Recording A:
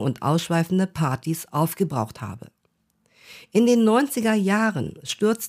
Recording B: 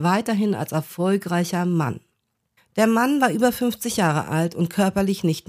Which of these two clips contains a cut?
B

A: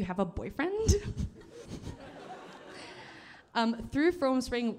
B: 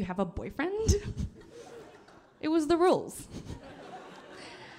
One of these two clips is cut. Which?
A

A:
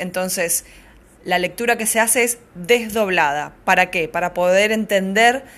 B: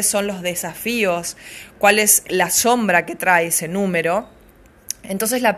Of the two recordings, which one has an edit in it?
B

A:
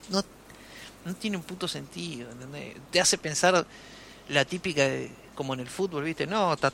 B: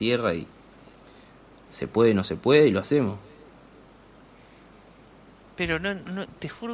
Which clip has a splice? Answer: A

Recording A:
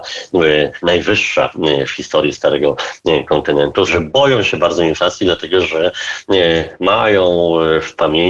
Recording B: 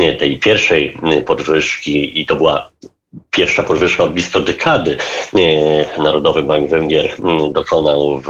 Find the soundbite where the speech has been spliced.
A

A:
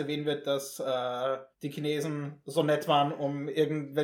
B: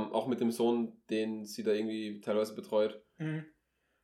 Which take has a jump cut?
A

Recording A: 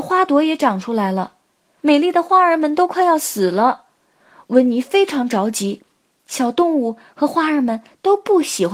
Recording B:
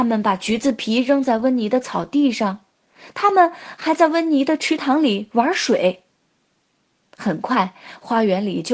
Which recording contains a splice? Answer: A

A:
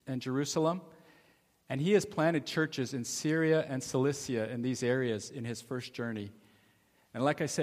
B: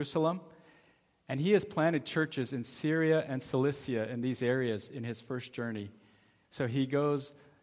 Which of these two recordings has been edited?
B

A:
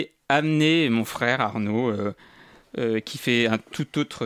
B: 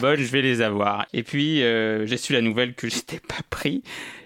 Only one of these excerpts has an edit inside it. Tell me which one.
B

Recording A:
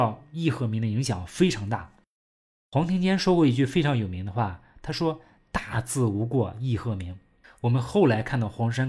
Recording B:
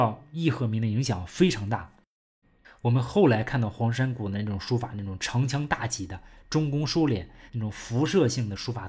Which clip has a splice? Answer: B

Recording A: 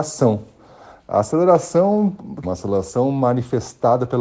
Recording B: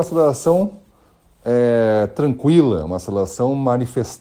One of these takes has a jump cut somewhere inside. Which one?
A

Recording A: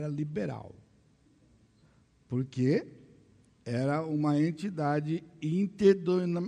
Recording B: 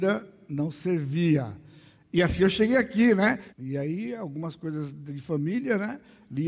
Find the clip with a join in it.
B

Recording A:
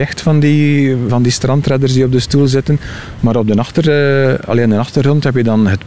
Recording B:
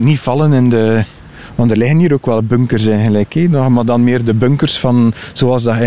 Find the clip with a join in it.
A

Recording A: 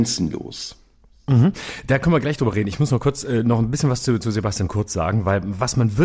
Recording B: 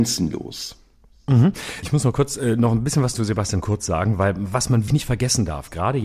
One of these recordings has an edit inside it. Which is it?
B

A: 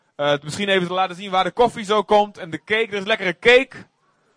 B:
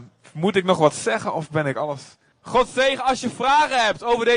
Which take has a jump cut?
B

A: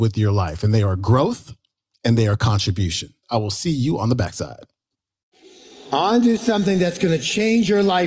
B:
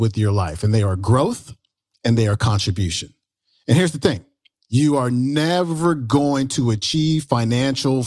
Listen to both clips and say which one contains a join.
A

